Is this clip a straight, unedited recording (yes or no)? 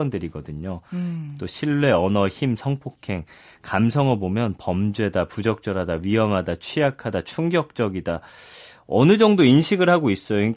yes